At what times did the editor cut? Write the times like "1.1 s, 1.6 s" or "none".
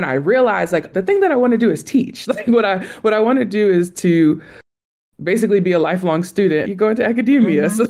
0.9 s, 6.6 s